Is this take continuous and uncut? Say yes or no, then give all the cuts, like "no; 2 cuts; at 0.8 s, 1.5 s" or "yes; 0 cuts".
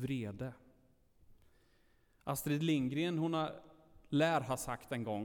yes; 0 cuts